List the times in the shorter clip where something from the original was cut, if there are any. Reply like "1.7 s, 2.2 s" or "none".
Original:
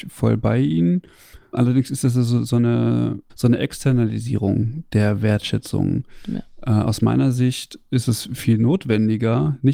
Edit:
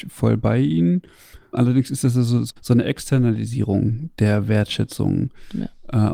2.5 s